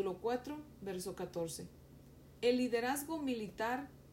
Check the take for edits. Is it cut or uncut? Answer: cut